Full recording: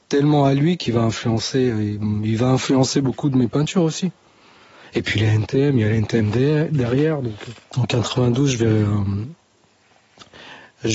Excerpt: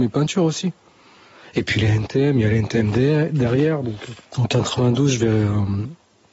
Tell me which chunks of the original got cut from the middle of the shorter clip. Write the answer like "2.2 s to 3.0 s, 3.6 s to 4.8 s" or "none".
none